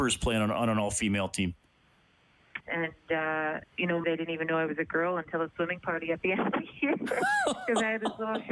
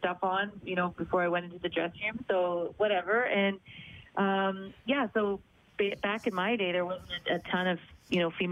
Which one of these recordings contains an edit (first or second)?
first